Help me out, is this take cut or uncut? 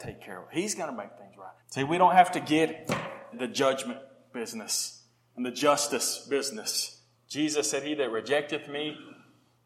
cut